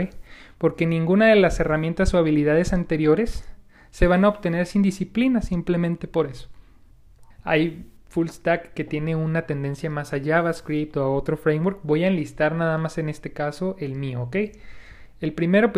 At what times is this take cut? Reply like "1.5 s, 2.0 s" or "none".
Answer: 7.3 s